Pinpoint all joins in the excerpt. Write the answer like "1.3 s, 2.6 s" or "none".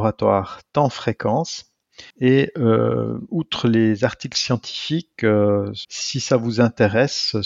2.1 s, 5.8 s